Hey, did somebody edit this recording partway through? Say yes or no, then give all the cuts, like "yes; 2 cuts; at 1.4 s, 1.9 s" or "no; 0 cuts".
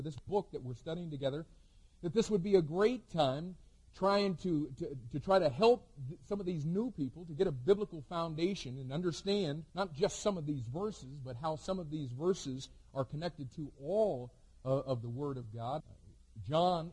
yes; 2 cuts; at 9.7 s, 15.8 s